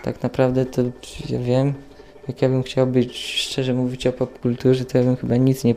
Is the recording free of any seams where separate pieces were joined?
yes; 0 cuts

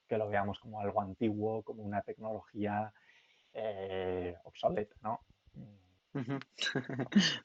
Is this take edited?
yes; 1 cut; at 6.0 s

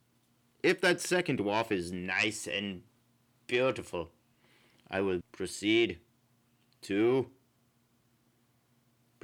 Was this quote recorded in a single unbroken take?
no; 1 cut; at 5.2 s

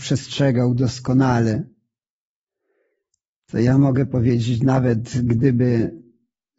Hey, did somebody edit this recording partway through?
no; 0 cuts

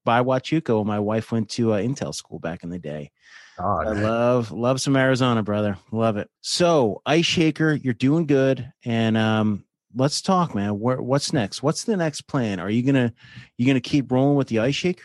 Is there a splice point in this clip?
yes; 1 cut; at 6.4 s

